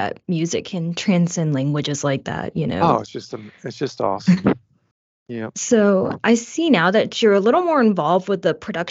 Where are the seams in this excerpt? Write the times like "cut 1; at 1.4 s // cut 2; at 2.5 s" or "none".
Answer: none